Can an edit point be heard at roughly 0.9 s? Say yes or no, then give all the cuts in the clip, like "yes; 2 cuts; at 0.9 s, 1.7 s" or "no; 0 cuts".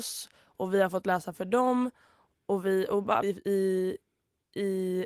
no; 1 cut; at 3.2 s